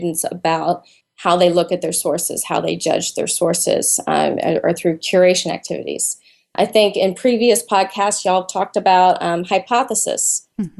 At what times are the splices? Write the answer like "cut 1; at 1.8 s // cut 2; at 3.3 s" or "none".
none